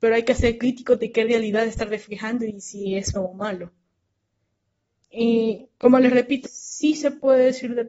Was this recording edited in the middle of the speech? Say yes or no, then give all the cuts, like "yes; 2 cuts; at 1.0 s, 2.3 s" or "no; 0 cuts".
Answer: yes; 2 cuts; at 3.2 s, 6.5 s